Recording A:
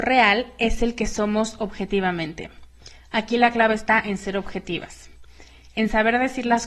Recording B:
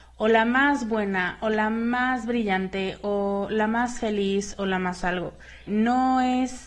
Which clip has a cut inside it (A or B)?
B